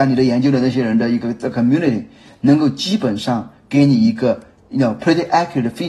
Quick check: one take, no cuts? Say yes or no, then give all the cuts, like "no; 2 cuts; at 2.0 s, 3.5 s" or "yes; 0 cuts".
yes; 0 cuts